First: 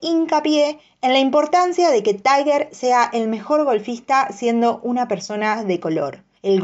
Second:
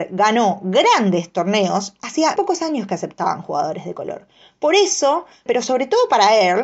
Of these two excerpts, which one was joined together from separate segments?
second; 2 cuts; at 2.4 s, 5.5 s

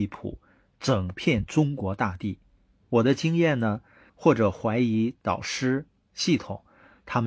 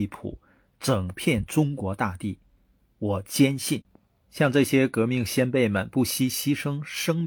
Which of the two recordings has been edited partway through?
first; 3 cuts; at 2.8 s, 4.1 s, 6.1 s

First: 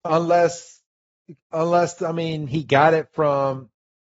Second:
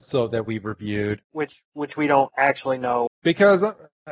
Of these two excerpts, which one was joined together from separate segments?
second; 2 cuts; at 1.2 s, 3.1 s

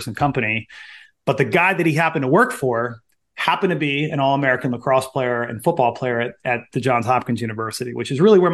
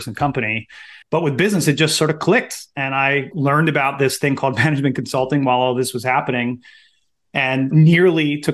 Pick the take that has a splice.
second; 1 cut; at 1.0 s

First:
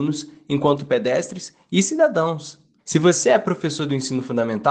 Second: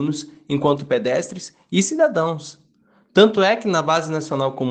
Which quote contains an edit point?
first; 1 cut; at 2.8 s

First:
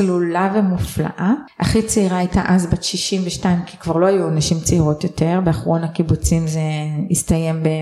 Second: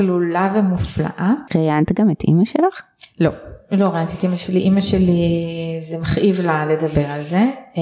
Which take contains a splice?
second; 1 cut; at 1.5 s

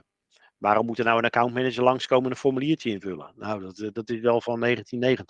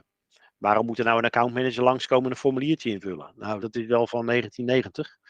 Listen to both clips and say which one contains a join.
second; 1 cut; at 3.6 s

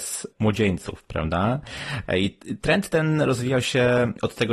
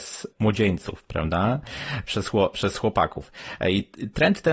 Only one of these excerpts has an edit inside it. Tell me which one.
first; 1 cut; at 2.1 s

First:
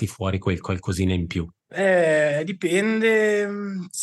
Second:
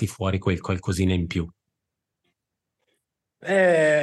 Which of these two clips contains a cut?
first; 1 cut; at 1.6 s

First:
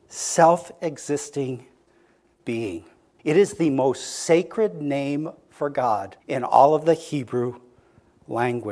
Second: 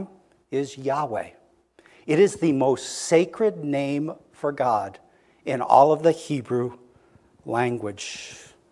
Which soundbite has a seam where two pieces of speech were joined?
first; 2 cuts; at 3.2 s, 6.2 s

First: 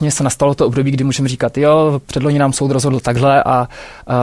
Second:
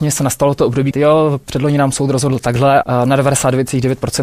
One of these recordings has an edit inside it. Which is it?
second; 2 cuts; at 0.9 s, 2.8 s

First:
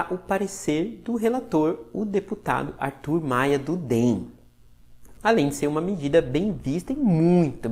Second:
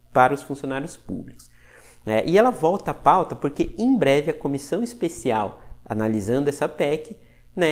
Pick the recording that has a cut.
first; 1 cut; at 5.2 s

